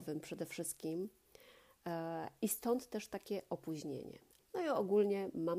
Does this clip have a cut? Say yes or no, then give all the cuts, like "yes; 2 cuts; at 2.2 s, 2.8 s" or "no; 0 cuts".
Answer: yes; 1 cut; at 4.4 s